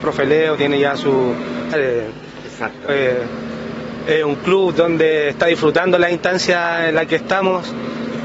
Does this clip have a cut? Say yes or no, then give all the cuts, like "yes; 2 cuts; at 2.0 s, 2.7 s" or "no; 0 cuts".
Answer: yes; 2 cuts; at 1.7 s, 2.9 s